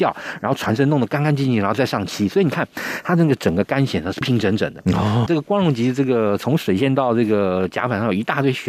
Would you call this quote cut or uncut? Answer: cut